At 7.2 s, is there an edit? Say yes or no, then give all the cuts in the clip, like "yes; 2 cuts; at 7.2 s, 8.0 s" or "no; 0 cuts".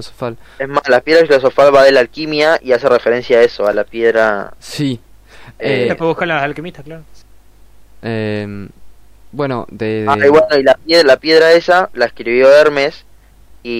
yes; 1 cut; at 7.2 s